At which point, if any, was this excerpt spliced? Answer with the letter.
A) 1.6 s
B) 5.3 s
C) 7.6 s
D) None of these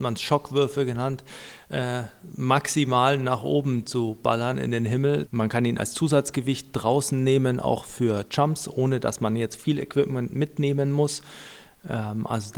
B